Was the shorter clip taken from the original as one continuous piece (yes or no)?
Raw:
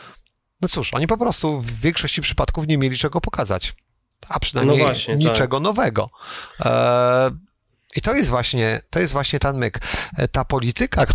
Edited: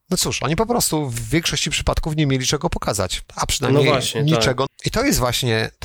no